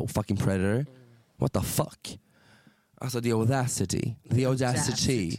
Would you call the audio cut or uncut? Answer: uncut